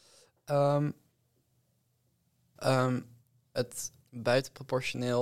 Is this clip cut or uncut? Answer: cut